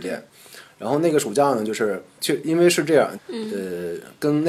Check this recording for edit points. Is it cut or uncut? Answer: cut